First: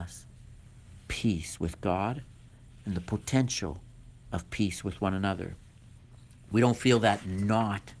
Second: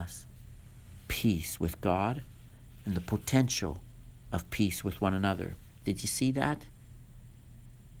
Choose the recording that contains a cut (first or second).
second